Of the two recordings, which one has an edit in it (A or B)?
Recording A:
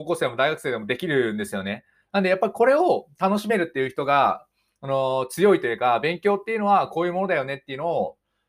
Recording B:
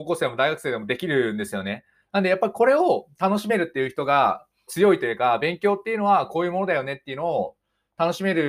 B